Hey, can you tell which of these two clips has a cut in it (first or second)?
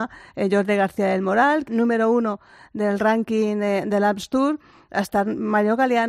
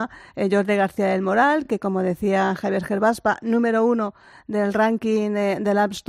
first